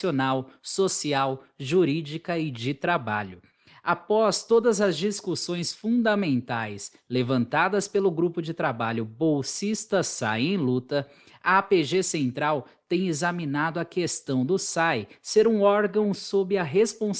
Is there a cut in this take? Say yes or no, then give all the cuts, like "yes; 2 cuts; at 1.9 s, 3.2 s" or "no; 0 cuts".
no; 0 cuts